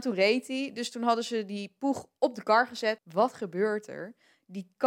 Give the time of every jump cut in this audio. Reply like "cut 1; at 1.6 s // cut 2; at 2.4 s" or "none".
cut 1; at 3.0 s